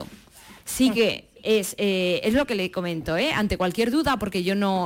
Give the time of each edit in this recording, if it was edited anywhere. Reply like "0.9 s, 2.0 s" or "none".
none